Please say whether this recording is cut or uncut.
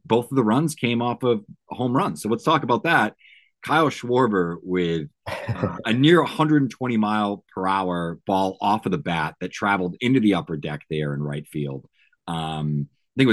uncut